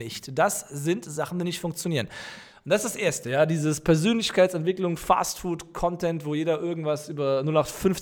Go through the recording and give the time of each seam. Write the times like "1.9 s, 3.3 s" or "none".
none